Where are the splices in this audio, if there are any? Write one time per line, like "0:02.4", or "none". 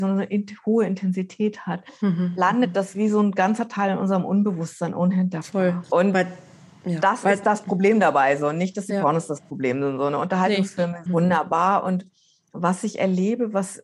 0:05.8
0:11.1